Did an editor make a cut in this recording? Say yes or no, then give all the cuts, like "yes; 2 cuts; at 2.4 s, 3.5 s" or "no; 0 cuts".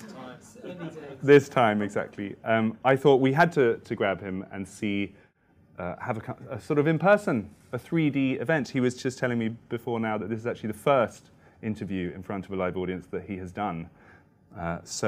no; 0 cuts